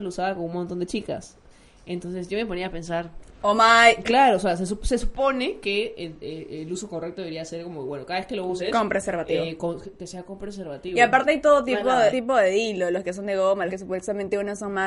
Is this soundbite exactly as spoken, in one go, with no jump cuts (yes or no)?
no